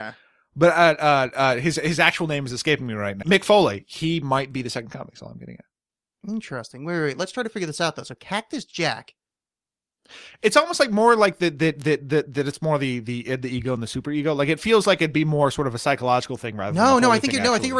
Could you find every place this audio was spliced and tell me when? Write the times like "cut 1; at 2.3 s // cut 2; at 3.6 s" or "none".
cut 1; at 3.2 s